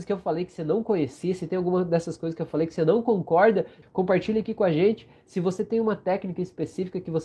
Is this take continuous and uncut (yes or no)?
no